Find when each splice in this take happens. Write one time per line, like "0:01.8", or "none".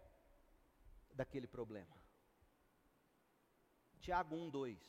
0:03.9